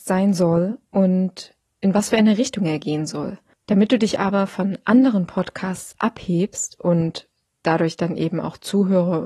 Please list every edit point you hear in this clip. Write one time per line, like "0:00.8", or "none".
0:03.5